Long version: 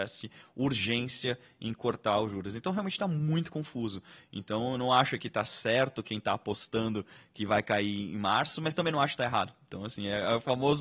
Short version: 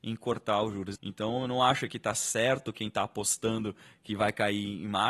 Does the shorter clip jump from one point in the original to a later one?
yes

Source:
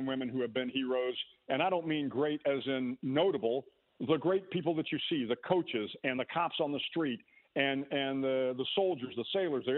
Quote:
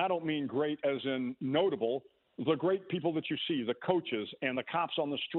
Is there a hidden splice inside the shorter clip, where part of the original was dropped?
no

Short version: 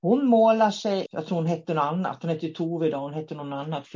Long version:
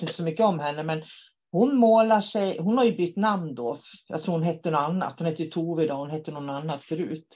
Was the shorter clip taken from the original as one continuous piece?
no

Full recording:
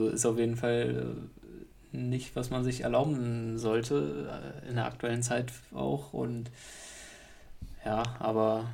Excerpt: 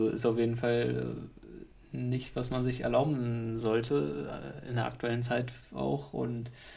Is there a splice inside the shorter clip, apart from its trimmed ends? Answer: no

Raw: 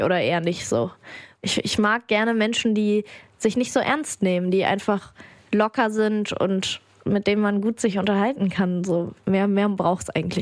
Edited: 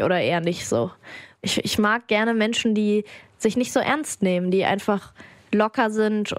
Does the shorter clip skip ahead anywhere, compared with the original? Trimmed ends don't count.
no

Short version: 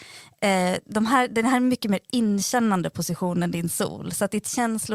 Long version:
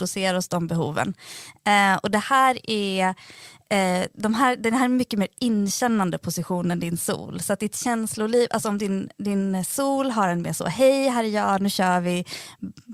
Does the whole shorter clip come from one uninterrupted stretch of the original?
yes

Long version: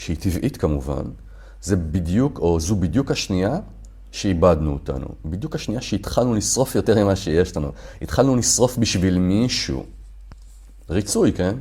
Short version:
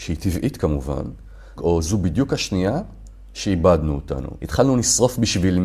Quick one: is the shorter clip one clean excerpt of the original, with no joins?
no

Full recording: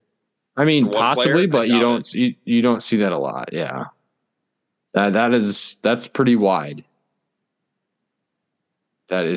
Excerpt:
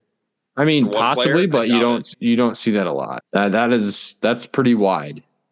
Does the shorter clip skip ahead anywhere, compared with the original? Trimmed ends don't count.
yes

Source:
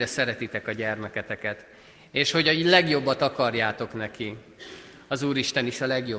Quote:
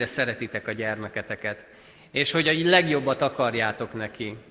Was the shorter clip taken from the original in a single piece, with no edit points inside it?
yes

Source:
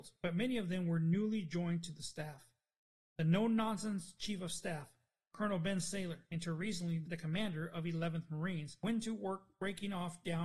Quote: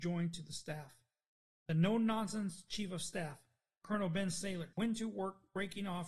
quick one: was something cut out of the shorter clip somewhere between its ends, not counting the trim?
yes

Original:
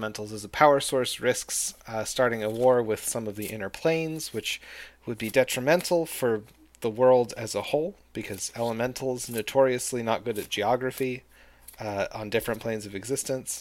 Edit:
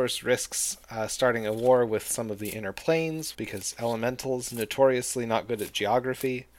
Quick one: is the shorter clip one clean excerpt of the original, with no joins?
no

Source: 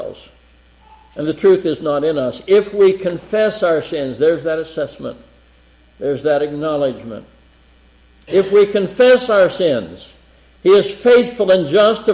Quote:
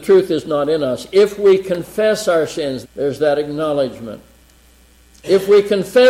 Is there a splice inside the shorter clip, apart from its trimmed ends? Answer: yes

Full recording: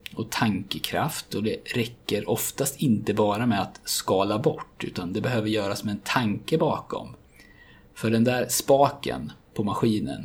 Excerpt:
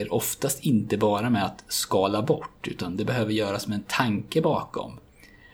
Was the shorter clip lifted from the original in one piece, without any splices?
yes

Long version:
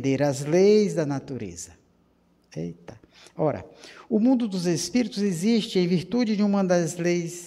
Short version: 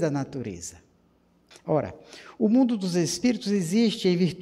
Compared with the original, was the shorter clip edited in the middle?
yes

